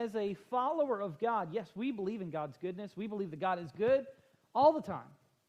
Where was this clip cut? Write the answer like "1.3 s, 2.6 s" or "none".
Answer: none